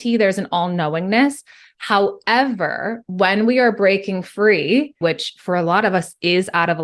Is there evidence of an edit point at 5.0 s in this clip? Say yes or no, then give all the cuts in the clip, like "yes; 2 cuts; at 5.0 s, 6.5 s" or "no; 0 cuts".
yes; 1 cut; at 5.0 s